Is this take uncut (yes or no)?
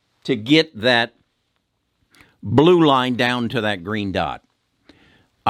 yes